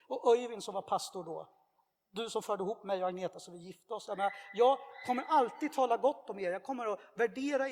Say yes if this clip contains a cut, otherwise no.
no